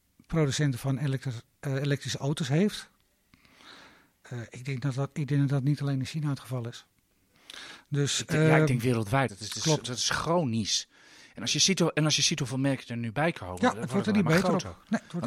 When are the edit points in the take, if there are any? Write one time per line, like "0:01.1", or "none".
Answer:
0:09.3